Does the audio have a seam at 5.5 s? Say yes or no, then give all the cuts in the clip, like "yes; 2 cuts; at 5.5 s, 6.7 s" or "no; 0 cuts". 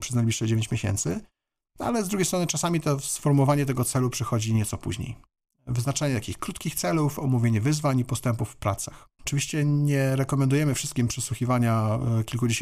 yes; 2 cuts; at 5.5 s, 9.2 s